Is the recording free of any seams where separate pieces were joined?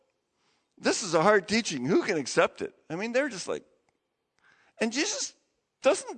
yes; 0 cuts

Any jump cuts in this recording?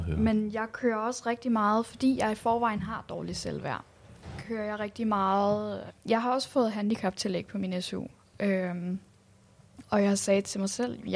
yes; 1 cut; at 5.9 s

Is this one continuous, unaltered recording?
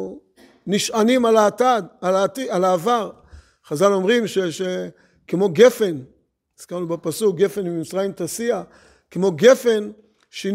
yes; 0 cuts

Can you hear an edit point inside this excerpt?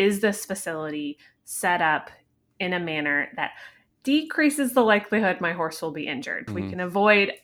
yes; 1 cut; at 6.5 s

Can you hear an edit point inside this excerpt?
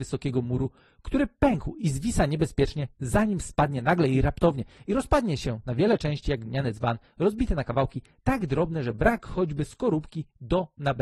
no; 0 cuts

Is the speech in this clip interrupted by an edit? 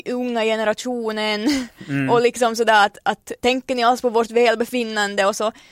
yes; 1 cut; at 3.4 s

